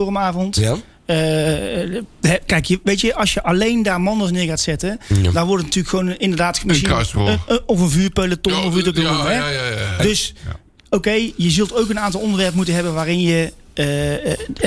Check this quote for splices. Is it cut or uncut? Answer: uncut